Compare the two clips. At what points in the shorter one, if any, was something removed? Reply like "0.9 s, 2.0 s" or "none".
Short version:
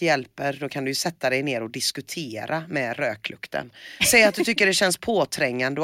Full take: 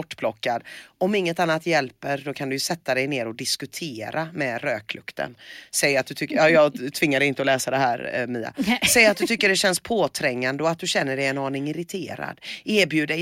4.0 s